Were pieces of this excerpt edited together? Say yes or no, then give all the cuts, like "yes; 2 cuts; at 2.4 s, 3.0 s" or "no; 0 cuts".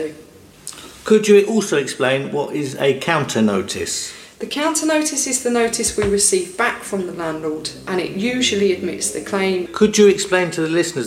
yes; 1 cut; at 9.7 s